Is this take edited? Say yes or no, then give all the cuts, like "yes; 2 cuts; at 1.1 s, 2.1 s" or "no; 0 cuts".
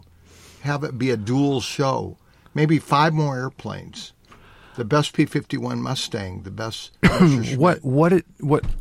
no; 0 cuts